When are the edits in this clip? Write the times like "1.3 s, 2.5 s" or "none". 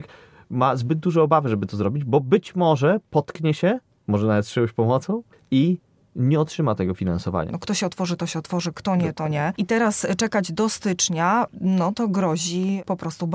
7.5 s